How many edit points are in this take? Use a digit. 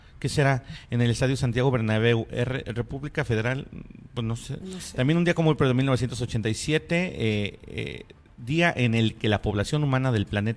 1